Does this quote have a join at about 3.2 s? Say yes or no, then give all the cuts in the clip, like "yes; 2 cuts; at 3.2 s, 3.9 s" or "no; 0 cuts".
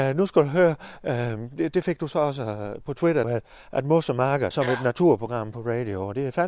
yes; 2 cuts; at 3.2 s, 4.5 s